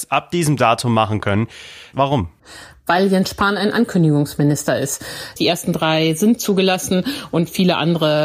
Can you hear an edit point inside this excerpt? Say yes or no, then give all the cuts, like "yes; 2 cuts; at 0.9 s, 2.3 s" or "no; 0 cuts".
yes; 2 cuts; at 1.9 s, 5.4 s